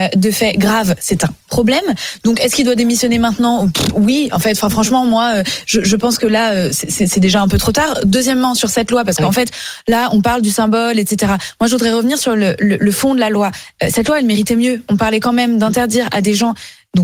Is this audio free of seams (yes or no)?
yes